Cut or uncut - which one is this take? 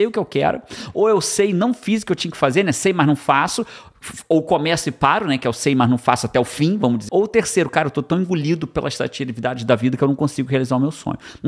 cut